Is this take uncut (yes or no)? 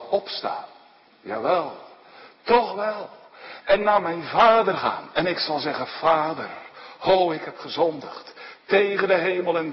yes